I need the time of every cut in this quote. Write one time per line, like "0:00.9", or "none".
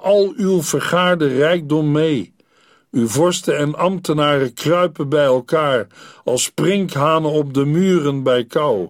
none